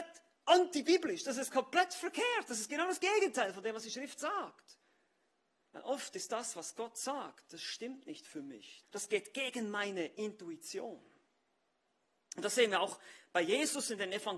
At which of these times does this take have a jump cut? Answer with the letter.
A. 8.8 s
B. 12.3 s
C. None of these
A